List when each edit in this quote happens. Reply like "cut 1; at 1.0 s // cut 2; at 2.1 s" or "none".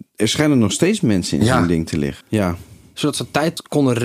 cut 1; at 2.2 s